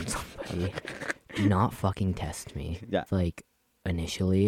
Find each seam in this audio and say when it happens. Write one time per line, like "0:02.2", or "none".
0:03.1